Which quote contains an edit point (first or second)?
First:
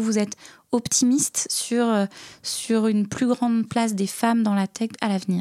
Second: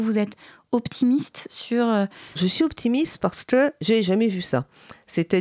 second